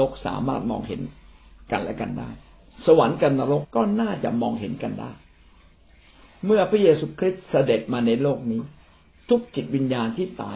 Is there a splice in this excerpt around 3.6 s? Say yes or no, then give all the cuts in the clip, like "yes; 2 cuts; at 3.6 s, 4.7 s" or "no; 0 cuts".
yes; 1 cut; at 3.6 s